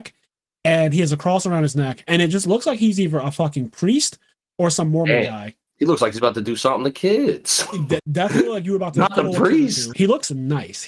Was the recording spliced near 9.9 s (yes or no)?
yes